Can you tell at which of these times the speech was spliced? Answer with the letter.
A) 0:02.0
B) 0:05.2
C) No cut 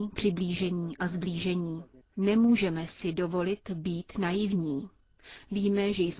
A